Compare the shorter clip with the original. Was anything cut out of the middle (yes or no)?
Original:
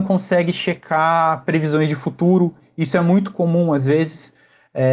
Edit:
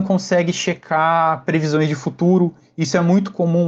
no